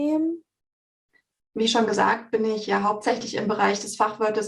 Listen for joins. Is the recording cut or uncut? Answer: uncut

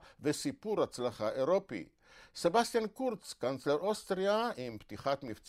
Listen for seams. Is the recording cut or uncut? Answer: uncut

